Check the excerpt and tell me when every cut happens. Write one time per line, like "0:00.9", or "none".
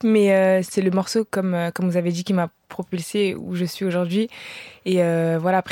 none